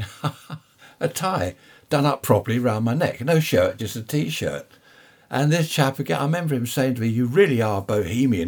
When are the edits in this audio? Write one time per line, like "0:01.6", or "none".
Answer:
none